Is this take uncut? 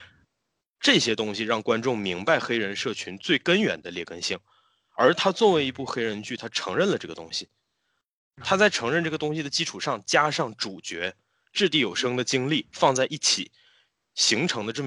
yes; 0 cuts

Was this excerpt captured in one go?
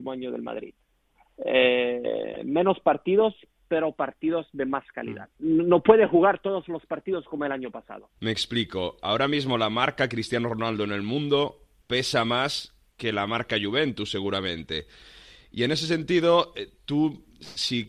no; 2 cuts; at 5.3 s, 8.2 s

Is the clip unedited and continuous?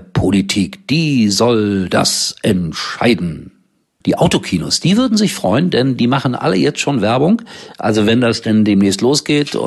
no; 1 cut; at 4.0 s

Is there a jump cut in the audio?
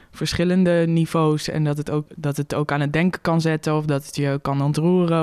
yes; 1 cut; at 2.1 s

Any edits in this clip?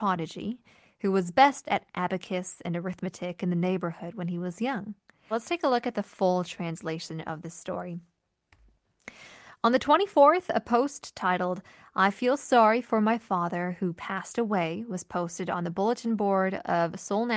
yes; 1 cut; at 5.3 s

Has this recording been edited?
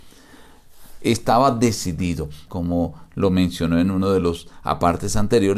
yes; 2 cuts; at 1.0 s, 2.5 s

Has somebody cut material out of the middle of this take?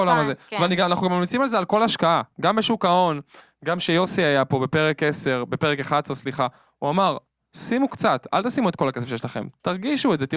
no; 0 cuts

